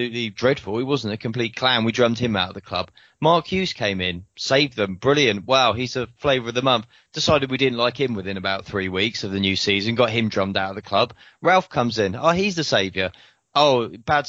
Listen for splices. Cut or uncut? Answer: uncut